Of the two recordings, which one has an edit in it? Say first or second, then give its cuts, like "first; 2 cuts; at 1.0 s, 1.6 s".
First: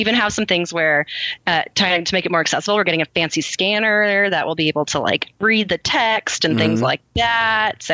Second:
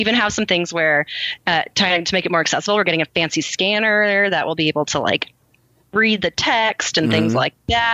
first; 1 cut; at 5.3 s